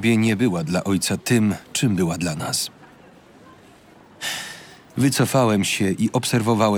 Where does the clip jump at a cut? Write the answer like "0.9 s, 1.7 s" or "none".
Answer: 4.9 s